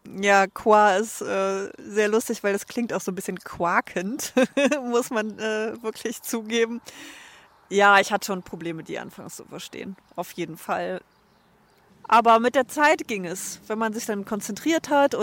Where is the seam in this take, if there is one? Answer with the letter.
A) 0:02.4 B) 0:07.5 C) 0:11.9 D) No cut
C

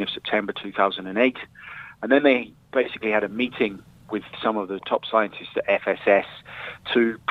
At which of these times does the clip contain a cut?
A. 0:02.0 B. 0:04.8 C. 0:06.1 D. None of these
B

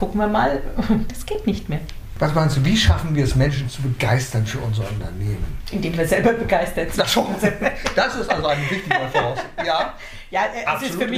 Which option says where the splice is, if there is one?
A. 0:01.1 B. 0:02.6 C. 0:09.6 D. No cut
A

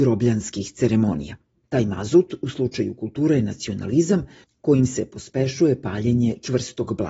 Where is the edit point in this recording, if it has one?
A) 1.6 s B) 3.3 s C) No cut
A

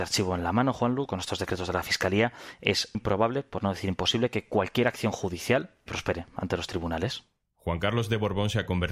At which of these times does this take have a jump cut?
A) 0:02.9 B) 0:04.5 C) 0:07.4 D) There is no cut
A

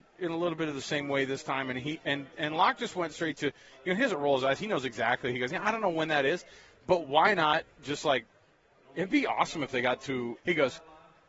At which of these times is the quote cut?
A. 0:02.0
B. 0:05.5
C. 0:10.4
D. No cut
C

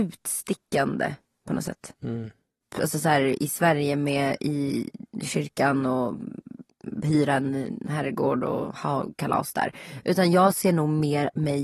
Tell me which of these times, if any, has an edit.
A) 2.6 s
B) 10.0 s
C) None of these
A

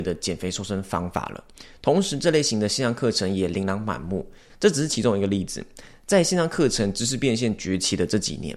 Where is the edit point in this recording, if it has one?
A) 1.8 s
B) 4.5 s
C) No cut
B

